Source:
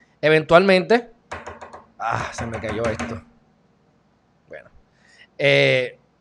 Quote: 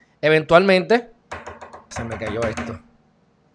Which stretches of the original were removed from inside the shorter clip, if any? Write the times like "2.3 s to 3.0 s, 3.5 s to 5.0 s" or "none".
1.9 s to 2.3 s